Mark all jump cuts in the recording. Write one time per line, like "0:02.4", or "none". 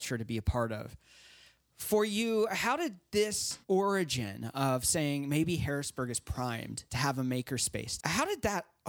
0:03.6
0:06.9
0:08.0